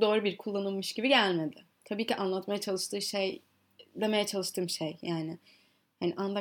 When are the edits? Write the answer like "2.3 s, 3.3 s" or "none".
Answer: none